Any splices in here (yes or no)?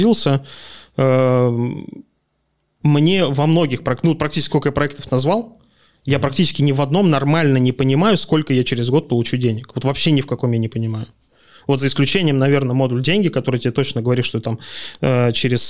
no